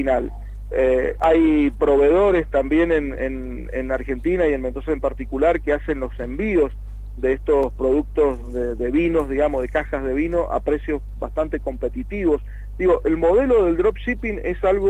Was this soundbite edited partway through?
no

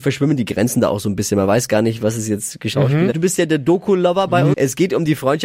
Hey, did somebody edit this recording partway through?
yes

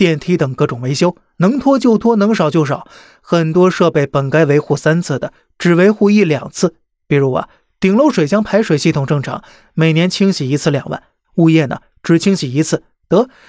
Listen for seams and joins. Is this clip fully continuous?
yes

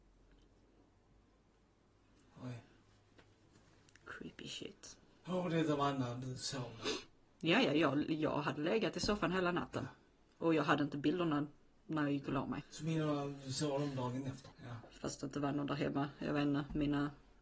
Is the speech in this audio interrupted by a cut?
yes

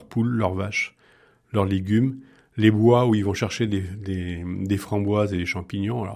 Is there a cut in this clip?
no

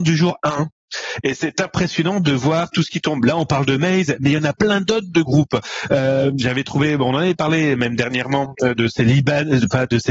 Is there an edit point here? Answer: no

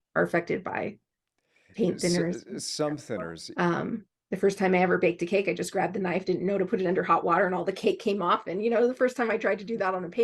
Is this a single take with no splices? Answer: no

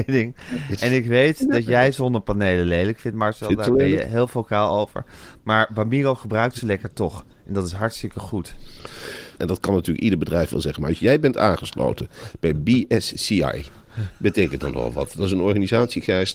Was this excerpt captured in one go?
no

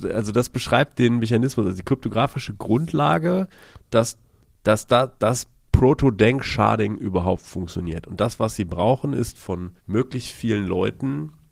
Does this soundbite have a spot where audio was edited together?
yes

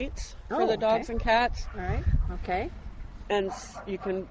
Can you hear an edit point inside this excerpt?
yes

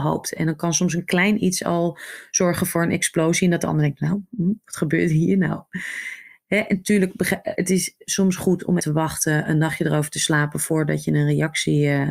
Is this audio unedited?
no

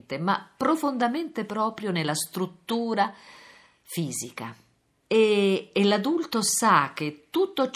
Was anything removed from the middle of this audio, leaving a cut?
yes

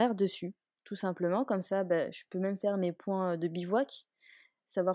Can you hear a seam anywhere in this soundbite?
no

